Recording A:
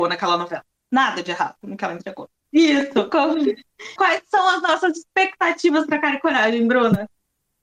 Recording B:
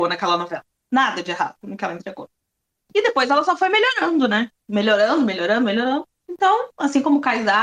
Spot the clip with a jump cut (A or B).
A